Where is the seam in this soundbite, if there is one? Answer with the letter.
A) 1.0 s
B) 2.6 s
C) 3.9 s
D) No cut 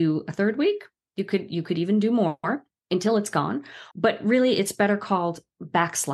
C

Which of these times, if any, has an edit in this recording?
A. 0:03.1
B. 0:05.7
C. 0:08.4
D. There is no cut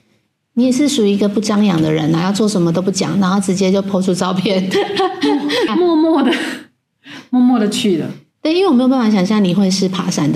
B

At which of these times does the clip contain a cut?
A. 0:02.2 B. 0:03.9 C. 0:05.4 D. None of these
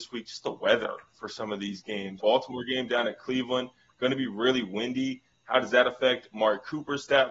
A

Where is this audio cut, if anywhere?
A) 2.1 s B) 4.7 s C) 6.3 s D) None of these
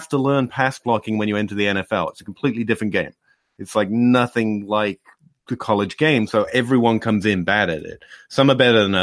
D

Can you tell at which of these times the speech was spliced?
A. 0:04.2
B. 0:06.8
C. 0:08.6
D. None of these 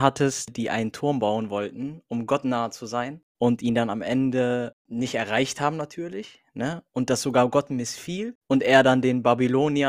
D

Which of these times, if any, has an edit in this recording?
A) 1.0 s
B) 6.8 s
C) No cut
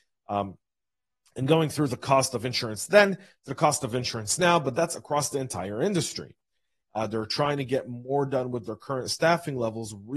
B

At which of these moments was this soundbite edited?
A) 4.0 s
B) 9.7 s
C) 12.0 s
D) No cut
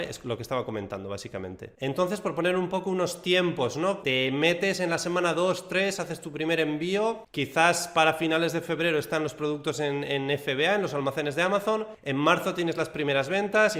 A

